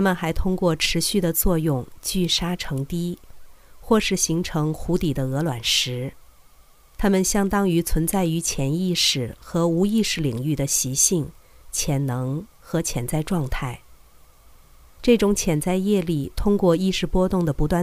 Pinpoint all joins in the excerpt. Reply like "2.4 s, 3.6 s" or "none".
7.0 s, 15.0 s